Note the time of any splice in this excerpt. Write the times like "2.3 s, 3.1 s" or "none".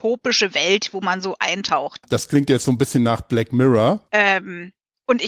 2.0 s, 4.1 s